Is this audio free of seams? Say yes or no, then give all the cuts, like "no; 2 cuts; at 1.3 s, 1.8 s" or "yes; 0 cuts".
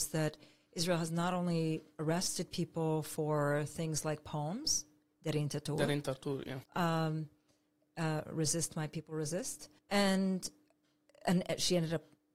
no; 2 cuts; at 6.6 s, 9.8 s